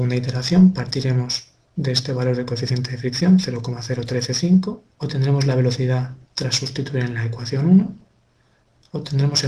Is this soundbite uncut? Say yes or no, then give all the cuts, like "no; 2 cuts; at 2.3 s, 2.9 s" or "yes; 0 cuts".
no; 2 cuts; at 4.9 s, 6.2 s